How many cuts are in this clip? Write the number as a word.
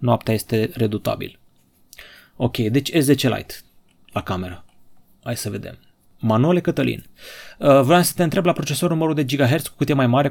zero